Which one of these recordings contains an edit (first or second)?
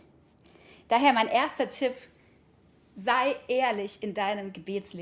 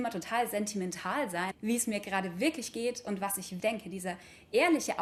second